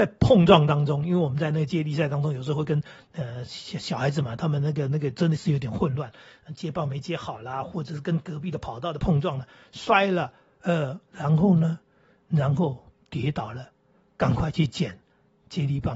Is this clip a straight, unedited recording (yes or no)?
yes